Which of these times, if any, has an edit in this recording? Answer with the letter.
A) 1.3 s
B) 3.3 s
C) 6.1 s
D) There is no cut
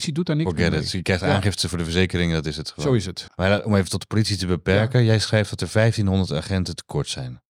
B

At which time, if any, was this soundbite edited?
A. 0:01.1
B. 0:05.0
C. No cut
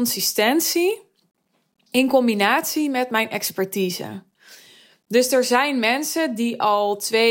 C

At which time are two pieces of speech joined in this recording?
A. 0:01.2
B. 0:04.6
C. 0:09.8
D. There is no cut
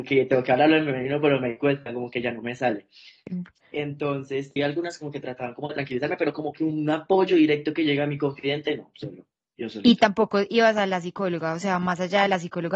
B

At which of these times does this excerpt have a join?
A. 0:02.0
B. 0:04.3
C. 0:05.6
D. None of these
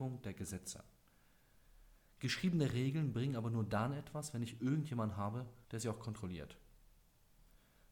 C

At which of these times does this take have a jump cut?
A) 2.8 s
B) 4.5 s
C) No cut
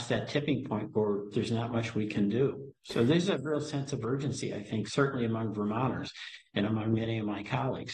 C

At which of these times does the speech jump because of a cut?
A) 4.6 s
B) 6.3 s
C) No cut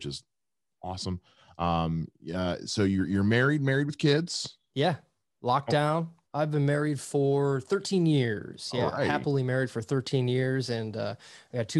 B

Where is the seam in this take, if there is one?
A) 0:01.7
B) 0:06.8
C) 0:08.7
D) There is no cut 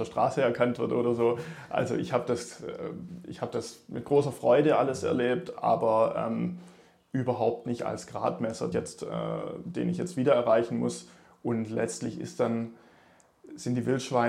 C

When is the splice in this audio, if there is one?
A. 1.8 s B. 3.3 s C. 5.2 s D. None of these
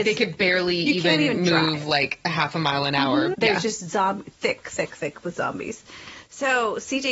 B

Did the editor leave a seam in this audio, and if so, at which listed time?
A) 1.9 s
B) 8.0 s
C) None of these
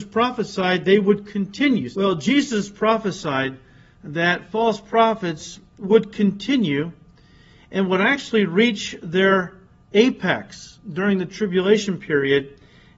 A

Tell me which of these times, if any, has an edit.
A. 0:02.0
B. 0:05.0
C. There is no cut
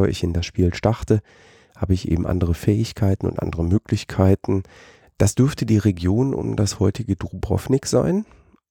B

